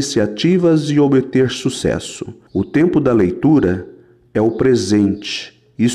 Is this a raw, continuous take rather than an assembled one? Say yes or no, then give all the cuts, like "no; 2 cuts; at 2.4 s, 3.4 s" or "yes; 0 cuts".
no; 1 cut; at 2.5 s